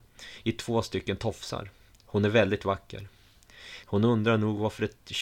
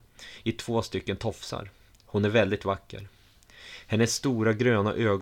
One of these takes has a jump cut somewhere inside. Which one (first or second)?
first